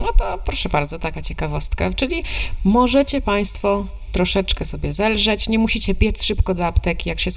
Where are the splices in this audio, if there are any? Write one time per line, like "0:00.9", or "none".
none